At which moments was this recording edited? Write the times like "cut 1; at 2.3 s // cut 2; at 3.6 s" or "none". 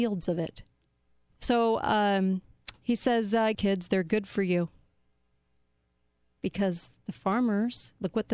cut 1; at 1.3 s // cut 2; at 3.5 s // cut 3; at 6.4 s